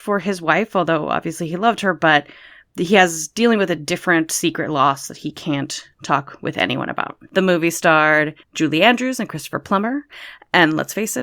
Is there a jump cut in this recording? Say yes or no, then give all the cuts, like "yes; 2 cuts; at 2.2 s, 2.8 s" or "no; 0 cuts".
yes; 2 cuts; at 7.3 s, 8.4 s